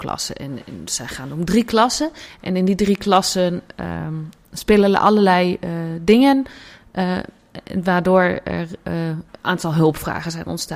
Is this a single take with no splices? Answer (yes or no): yes